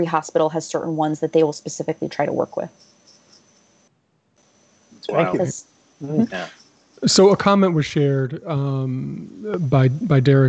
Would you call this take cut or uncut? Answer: uncut